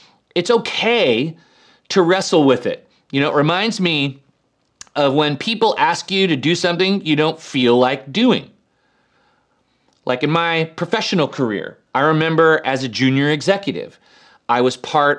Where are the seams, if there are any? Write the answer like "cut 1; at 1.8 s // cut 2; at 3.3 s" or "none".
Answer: cut 1; at 11.9 s